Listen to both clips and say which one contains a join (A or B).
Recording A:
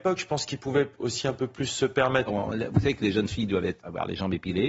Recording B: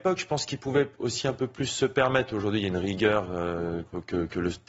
A